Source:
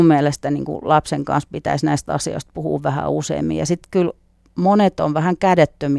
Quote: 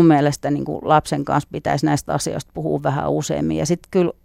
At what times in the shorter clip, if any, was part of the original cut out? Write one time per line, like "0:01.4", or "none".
none